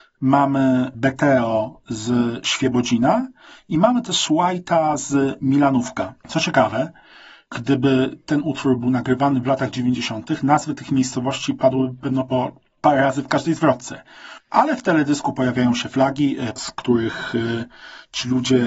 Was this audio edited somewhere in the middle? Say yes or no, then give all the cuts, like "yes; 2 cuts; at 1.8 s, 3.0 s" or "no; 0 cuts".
yes; 2 cuts; at 14.4 s, 16.6 s